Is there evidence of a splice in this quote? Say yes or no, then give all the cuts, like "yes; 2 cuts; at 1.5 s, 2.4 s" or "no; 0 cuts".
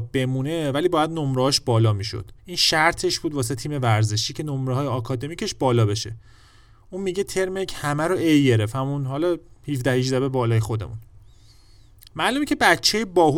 yes; 1 cut; at 2.4 s